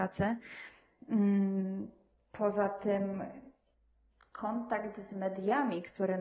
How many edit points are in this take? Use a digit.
0